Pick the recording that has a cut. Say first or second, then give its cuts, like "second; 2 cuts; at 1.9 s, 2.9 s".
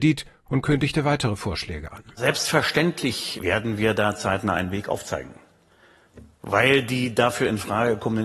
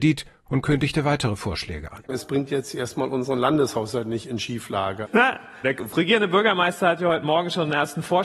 second; 2 cuts; at 2.0 s, 5.1 s